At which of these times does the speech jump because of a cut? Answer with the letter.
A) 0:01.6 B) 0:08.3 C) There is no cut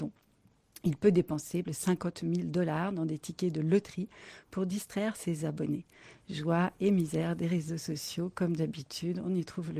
A